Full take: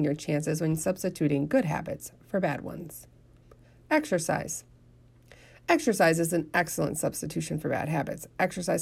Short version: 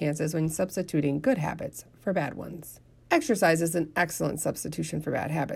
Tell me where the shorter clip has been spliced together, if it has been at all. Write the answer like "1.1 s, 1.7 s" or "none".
3.0 s

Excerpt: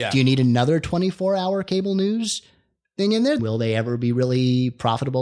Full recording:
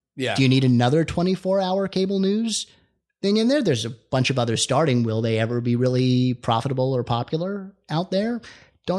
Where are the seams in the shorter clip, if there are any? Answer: 3.4 s

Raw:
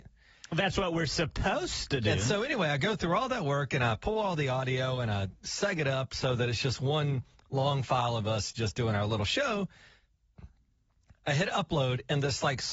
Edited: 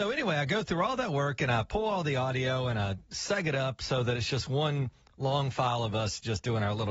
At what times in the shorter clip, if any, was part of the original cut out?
none

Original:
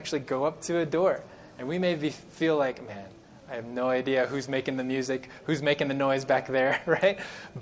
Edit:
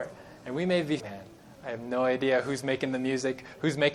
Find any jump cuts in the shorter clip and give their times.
1.0 s

